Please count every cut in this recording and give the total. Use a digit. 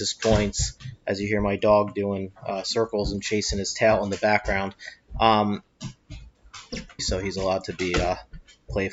1